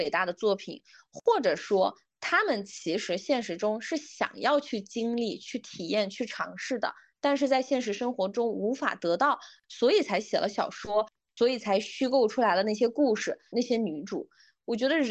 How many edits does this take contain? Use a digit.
1